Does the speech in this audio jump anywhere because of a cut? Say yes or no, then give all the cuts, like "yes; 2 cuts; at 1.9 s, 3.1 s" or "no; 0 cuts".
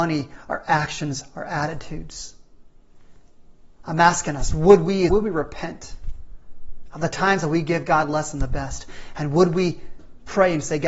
yes; 1 cut; at 5.1 s